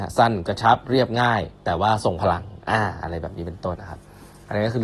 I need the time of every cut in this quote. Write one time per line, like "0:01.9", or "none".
0:03.8